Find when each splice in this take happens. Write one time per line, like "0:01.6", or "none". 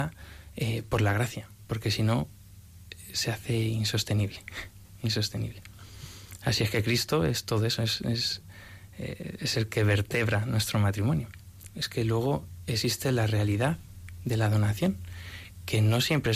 0:11.7